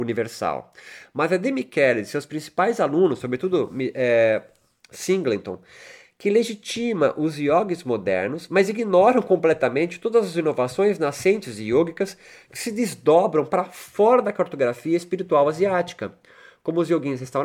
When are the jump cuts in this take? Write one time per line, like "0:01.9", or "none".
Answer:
none